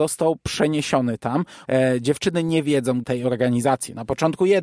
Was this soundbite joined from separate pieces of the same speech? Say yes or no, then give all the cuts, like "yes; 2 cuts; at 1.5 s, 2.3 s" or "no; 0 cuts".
yes; 2 cuts; at 1.6 s, 3.0 s